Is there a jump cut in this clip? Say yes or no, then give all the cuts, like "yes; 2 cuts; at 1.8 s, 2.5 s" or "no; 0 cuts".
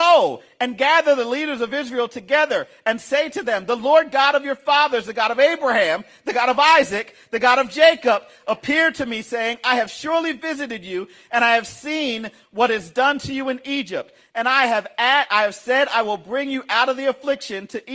no; 0 cuts